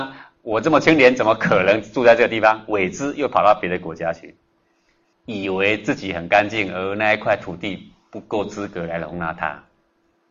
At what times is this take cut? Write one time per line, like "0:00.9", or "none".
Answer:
0:05.1